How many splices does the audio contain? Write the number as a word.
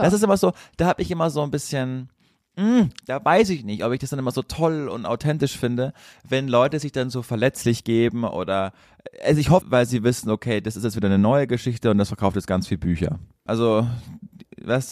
three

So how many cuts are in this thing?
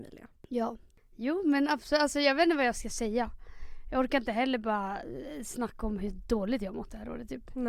zero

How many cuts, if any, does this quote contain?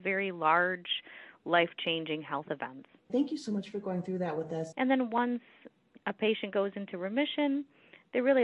two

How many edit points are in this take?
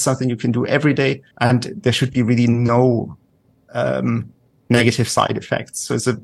one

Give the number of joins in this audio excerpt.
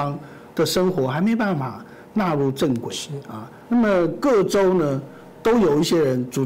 one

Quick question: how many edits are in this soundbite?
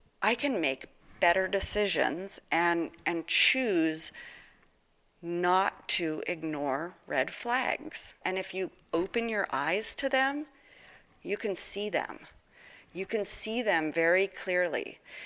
one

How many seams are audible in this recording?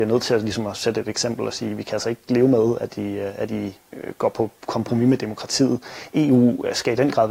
zero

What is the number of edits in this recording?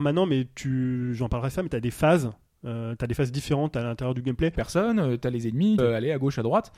two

